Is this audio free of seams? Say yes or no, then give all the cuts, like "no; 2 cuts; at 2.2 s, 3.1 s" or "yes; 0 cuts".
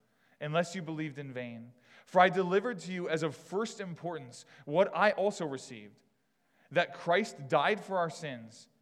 yes; 0 cuts